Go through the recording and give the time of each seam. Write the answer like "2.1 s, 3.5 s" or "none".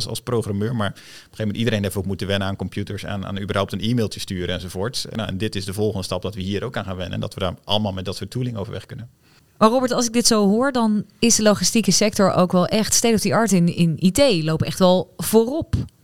none